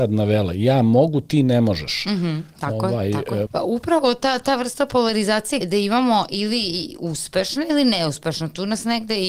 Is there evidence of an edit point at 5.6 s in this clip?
yes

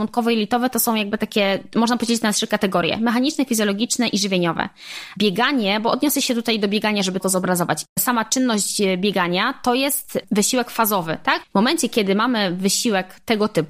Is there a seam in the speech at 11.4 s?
yes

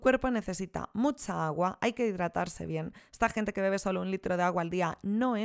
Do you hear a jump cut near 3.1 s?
no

